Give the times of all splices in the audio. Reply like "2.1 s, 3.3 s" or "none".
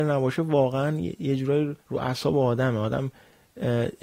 1.8 s